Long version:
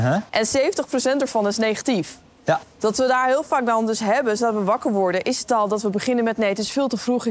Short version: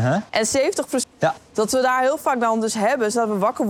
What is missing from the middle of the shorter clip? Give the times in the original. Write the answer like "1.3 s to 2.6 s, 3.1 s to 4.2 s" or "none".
1.0 s to 2.3 s